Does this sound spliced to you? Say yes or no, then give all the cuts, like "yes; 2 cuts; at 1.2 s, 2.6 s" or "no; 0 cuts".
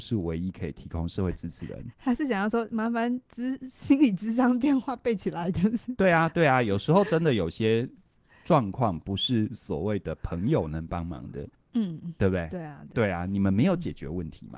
yes; 1 cut; at 11.5 s